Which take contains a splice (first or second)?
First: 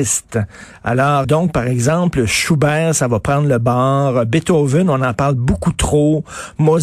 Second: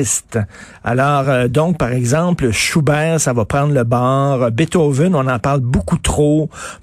first